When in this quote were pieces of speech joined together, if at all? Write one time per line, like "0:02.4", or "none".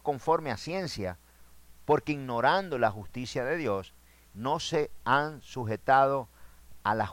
0:04.3